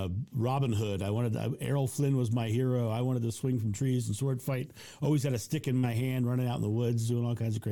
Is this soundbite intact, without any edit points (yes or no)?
yes